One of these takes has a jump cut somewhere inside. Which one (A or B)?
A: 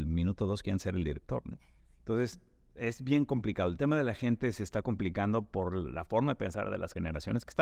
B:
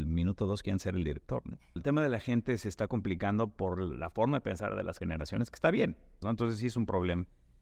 B